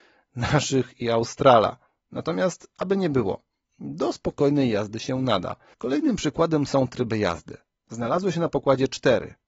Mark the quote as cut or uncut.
cut